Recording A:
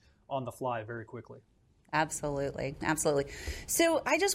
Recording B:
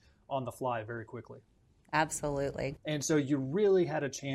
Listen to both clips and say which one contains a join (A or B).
B